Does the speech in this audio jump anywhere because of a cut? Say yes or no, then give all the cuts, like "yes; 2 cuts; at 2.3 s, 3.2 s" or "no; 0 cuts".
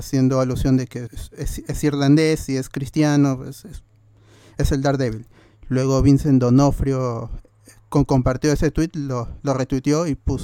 yes; 2 cuts; at 1.1 s, 5.5 s